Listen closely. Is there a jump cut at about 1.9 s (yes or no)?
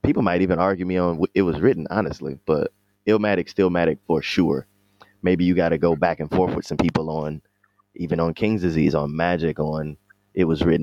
no